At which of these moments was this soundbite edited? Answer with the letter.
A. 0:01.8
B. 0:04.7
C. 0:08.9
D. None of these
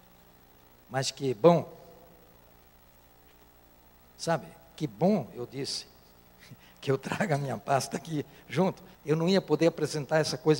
C